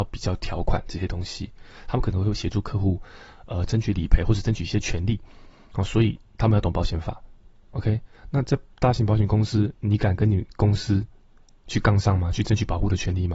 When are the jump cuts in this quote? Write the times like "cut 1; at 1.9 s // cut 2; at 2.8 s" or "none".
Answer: none